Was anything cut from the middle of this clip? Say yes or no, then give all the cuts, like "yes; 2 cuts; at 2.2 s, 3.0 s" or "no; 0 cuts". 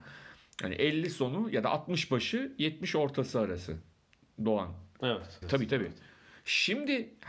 yes; 1 cut; at 5.4 s